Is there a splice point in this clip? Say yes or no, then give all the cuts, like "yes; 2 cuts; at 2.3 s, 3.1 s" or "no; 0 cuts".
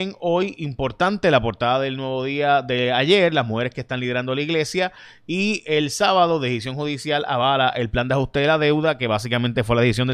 no; 0 cuts